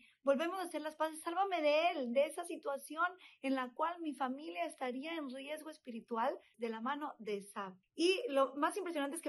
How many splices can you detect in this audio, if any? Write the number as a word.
two